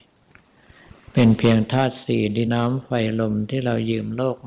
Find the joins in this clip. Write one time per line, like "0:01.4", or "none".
0:02.5